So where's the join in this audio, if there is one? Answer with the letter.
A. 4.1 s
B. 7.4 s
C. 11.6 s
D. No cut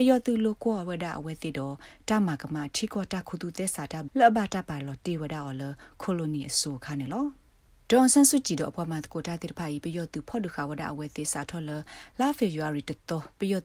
A